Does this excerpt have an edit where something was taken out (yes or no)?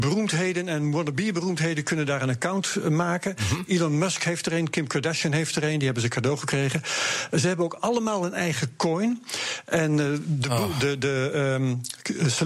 no